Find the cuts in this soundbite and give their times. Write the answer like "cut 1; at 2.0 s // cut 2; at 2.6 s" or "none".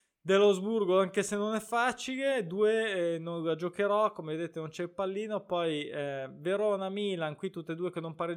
none